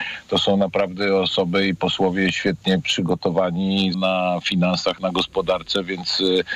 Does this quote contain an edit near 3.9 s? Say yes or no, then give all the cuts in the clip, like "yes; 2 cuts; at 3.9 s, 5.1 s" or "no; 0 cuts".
yes; 1 cut; at 3.9 s